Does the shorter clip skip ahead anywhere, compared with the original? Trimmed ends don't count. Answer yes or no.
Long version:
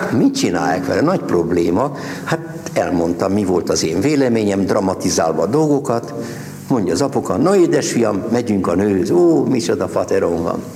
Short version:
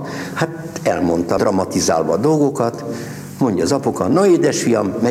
yes